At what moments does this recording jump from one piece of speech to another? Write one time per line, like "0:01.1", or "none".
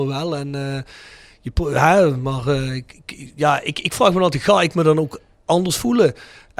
none